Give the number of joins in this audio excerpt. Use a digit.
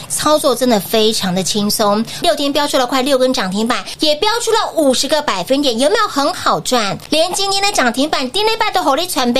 1